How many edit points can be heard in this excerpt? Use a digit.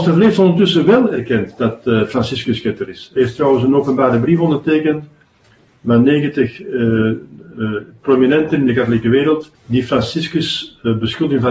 2